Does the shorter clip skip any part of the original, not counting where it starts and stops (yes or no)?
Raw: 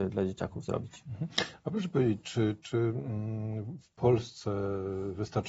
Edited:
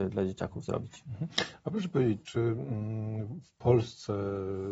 yes